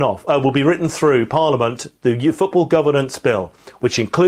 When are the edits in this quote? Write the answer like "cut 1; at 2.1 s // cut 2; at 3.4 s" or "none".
none